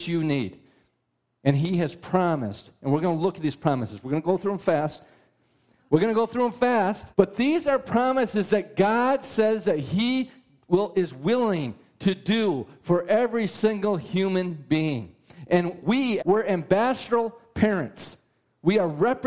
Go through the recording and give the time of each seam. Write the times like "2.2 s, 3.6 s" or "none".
7.1 s, 16.2 s